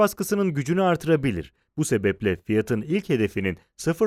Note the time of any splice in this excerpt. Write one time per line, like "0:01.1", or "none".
none